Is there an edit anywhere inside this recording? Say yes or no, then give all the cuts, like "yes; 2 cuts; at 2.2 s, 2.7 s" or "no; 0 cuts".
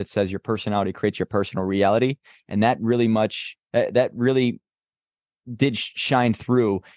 no; 0 cuts